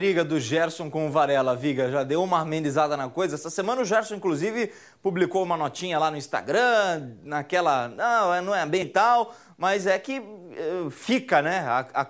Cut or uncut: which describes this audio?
cut